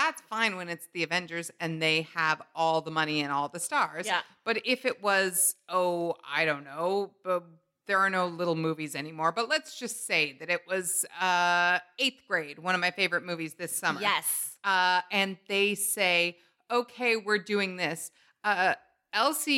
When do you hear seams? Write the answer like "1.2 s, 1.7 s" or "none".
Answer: none